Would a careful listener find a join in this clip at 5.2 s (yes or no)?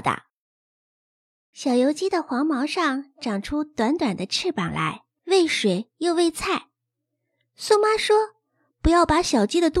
yes